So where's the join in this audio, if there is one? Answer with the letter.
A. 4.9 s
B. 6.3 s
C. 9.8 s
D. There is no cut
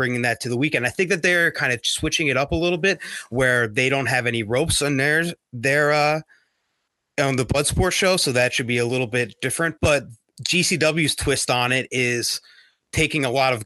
C